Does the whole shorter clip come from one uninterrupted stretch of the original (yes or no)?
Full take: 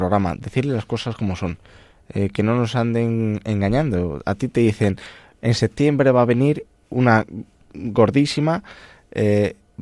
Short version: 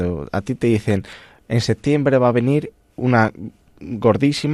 yes